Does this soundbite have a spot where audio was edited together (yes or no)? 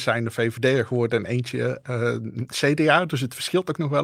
no